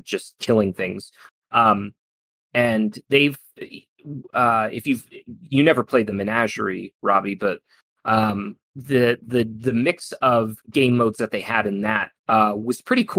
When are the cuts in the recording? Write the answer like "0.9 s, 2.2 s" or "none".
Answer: 8.6 s, 12.2 s